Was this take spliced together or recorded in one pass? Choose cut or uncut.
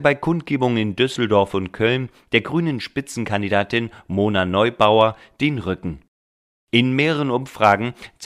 uncut